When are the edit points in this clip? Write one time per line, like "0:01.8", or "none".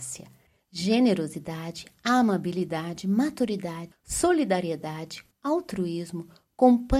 0:03.9
0:05.3